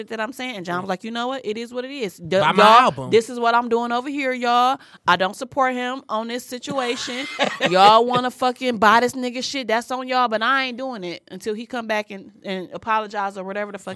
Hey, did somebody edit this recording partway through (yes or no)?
no